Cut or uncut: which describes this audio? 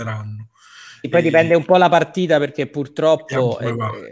uncut